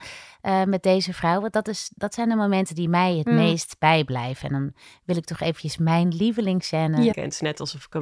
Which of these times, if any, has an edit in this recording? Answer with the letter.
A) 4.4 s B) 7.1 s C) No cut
B